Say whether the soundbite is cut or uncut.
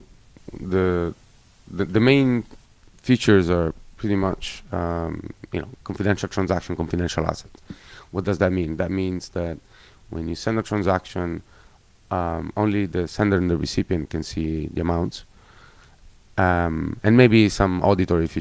uncut